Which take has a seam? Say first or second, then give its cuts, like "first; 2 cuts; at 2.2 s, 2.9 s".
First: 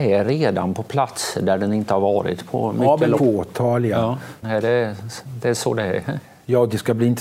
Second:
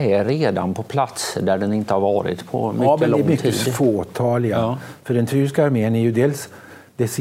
first; 2 cuts; at 3.2 s, 4.4 s